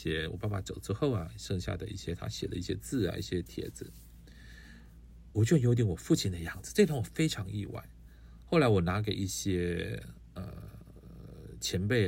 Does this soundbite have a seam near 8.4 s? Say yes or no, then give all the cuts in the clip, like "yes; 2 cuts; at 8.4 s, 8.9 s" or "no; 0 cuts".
no; 1 cut; at 5.3 s